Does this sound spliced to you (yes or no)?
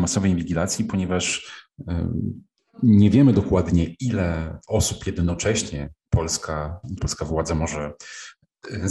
yes